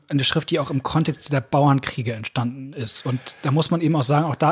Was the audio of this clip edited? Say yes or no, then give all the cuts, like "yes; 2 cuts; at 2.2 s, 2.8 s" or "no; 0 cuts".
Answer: no; 0 cuts